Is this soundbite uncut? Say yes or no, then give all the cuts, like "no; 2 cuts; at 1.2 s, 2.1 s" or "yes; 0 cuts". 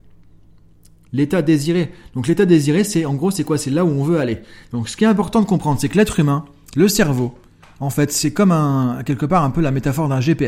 yes; 0 cuts